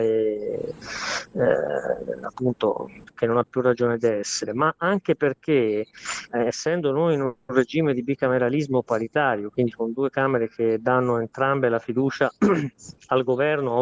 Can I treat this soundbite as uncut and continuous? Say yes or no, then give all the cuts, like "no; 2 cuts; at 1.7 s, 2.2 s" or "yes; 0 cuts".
yes; 0 cuts